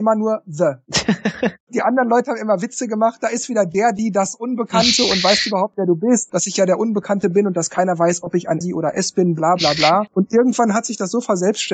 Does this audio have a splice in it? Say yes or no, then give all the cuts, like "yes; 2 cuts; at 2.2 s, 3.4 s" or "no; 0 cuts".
yes; 1 cut; at 8.6 s